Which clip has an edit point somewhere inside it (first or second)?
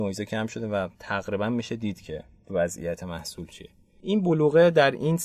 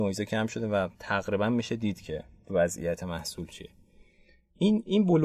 first